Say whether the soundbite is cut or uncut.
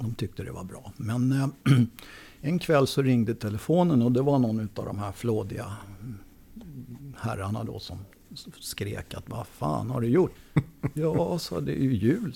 cut